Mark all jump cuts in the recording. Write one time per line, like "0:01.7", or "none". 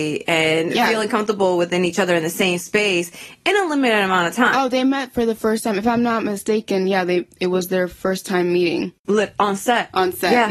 0:09.0